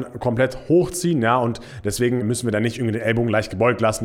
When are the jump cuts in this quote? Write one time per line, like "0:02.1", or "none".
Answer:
0:02.2